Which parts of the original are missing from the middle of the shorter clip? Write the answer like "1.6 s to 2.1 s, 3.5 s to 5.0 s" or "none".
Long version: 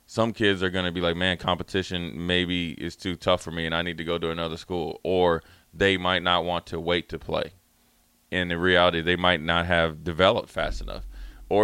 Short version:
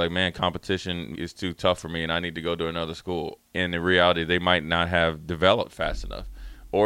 2.2 s to 2.8 s, 5.0 s to 8.2 s